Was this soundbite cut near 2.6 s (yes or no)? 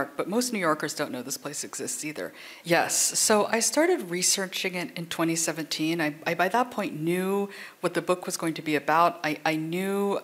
yes